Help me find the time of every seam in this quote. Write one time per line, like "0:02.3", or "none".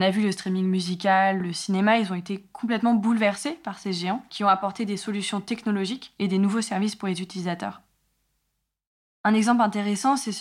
0:01.4